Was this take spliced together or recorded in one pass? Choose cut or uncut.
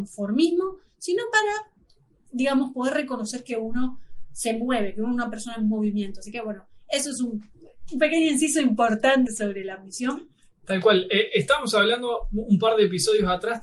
cut